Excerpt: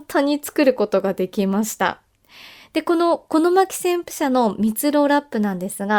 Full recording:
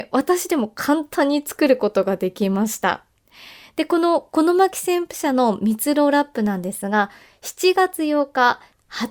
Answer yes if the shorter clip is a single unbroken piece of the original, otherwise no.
yes